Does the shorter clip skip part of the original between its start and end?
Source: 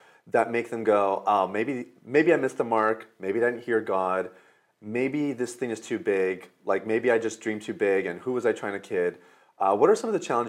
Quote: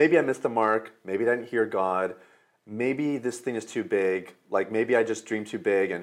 no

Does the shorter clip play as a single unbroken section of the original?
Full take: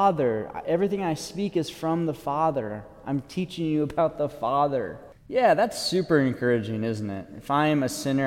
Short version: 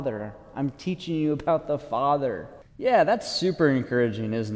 yes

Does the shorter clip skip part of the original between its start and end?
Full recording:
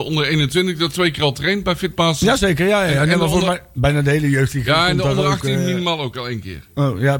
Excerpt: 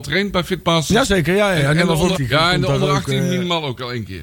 yes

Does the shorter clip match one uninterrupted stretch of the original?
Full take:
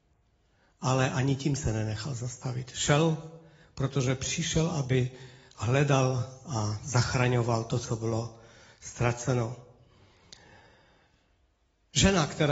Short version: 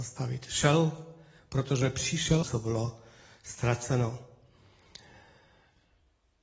no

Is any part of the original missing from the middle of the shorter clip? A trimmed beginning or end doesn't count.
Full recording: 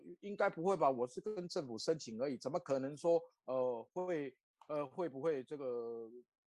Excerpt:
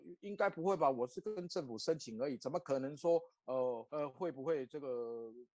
yes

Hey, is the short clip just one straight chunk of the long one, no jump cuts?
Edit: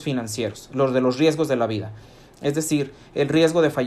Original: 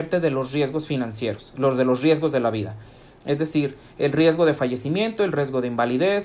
yes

